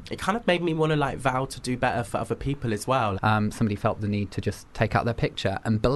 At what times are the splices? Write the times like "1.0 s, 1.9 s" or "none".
3.1 s